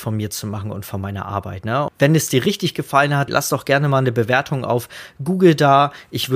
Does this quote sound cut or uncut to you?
cut